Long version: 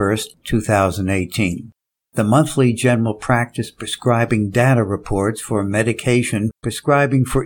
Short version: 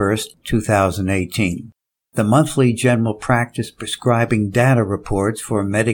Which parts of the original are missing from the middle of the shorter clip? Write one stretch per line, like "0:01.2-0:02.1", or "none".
none